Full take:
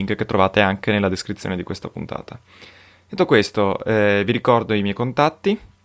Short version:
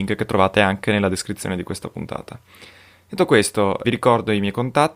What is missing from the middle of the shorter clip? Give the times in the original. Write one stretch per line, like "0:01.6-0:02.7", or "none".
0:03.8-0:04.3